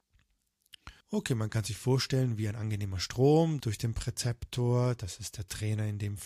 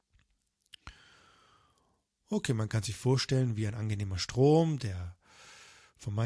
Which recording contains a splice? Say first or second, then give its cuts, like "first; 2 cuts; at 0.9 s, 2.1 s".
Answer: first; 2 cuts; at 1.0 s, 3.6 s